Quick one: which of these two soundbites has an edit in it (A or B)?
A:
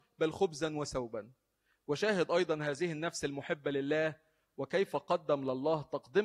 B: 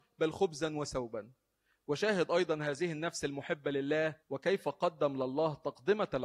B